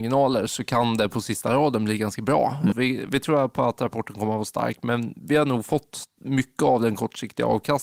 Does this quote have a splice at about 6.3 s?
no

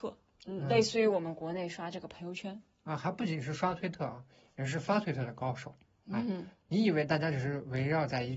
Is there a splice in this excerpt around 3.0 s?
no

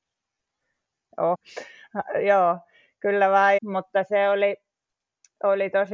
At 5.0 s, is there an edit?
no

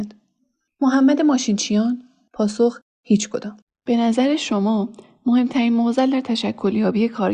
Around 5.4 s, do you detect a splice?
no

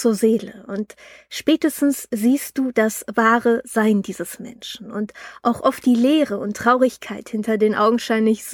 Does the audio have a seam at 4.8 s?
no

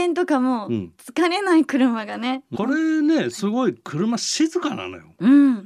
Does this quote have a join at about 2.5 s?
yes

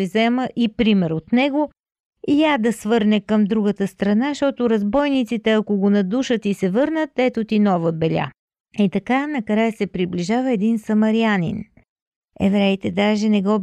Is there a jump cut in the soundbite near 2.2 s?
no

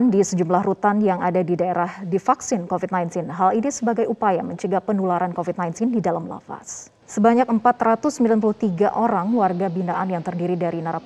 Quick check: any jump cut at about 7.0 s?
yes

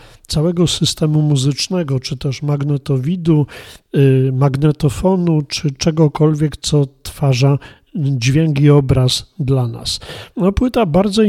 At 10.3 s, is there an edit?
yes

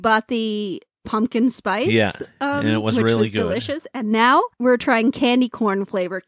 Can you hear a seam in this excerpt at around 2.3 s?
no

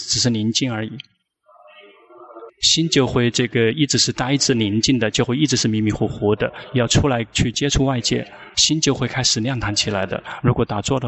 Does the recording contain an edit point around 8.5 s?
yes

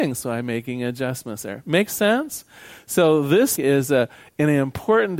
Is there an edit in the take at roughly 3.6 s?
yes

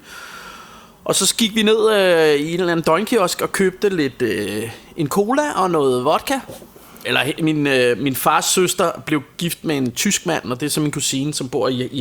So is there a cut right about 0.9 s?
no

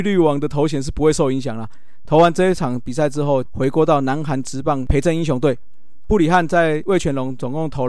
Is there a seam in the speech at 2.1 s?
yes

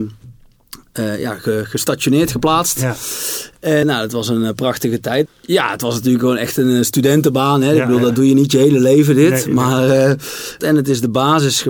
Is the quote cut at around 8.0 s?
no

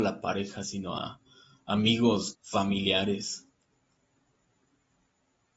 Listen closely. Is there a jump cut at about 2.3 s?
yes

